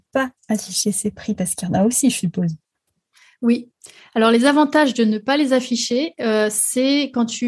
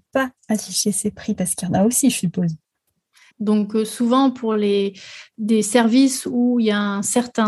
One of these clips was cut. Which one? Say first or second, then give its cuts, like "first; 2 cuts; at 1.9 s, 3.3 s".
second; 1 cut; at 3.3 s